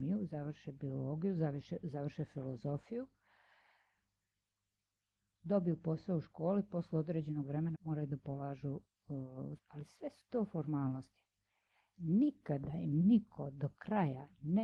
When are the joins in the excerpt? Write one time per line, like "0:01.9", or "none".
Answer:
0:07.7
0:09.6

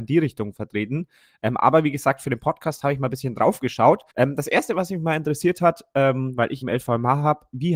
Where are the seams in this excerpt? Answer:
0:04.1
0:06.6

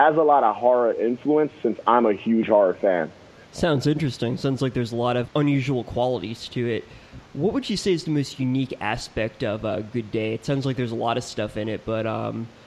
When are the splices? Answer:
0:03.4
0:05.2

